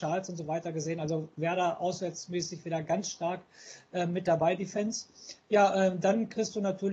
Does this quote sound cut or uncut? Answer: uncut